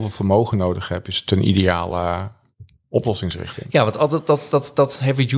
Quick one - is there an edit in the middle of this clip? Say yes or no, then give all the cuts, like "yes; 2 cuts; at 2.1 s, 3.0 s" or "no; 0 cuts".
no; 0 cuts